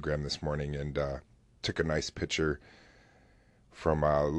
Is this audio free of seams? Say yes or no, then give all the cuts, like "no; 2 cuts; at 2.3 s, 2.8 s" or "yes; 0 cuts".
yes; 0 cuts